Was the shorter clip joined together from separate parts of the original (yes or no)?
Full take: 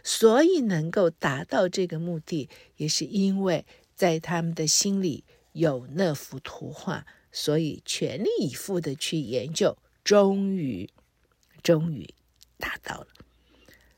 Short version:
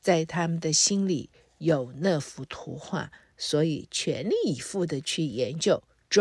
no